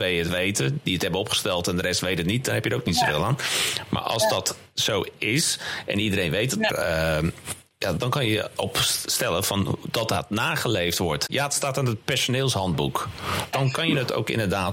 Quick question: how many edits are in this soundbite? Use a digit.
3